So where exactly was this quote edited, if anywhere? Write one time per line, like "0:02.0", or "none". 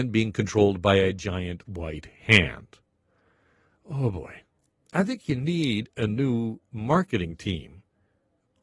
none